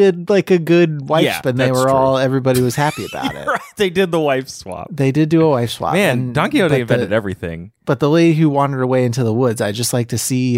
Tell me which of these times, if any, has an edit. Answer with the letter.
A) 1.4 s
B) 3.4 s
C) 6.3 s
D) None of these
A